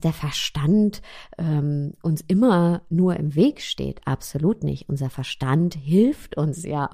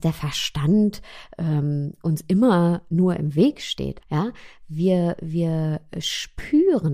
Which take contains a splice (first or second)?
second